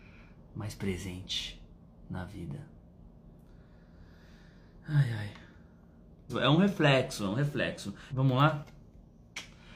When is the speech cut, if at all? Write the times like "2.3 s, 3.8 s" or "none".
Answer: 6.3 s, 8.1 s